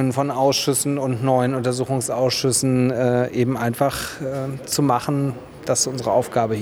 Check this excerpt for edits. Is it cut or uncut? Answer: uncut